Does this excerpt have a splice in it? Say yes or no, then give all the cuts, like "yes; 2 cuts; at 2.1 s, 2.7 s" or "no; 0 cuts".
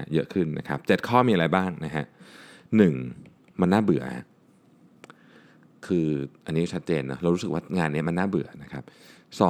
no; 0 cuts